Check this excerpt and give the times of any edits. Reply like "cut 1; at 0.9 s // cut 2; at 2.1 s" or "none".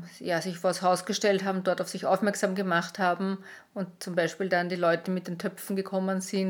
none